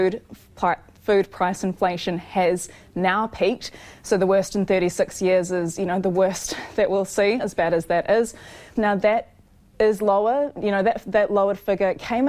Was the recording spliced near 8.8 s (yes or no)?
yes